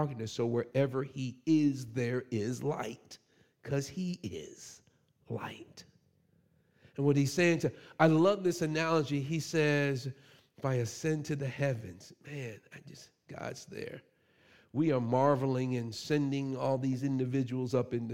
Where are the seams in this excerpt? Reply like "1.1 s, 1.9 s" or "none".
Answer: none